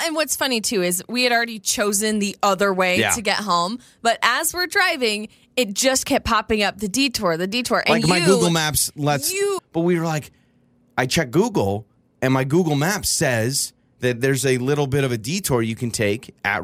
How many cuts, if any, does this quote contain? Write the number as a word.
one